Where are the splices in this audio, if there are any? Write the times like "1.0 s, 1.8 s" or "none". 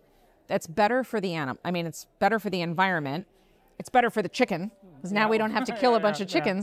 none